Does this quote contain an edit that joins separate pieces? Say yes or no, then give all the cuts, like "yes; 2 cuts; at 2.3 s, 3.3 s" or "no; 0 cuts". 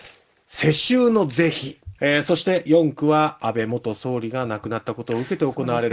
yes; 1 cut; at 2.0 s